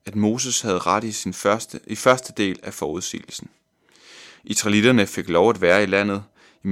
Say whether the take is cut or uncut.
uncut